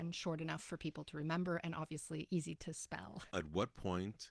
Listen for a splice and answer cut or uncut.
cut